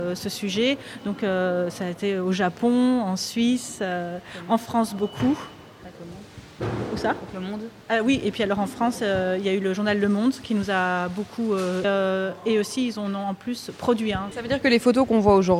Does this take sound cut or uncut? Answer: cut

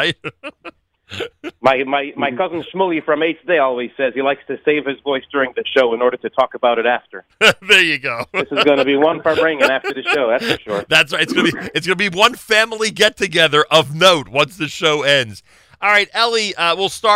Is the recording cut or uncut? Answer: uncut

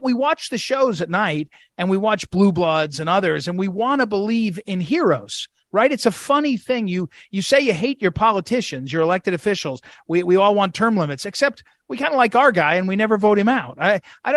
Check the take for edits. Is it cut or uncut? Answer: uncut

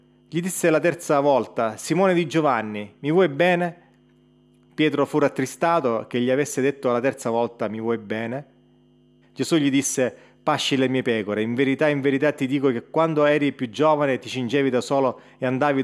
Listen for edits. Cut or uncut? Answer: cut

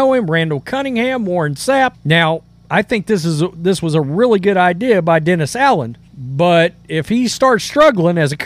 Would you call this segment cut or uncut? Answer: cut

